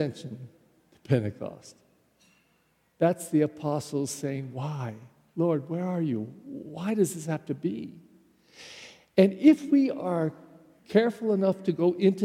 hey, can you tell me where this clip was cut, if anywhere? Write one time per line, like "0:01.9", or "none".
none